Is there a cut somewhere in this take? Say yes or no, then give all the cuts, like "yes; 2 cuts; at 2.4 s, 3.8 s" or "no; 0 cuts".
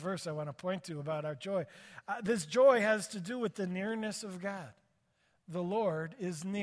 no; 0 cuts